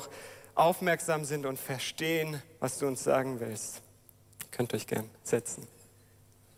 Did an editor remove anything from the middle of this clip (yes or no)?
yes